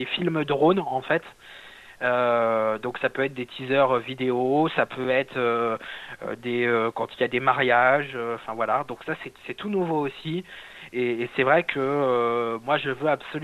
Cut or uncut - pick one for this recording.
uncut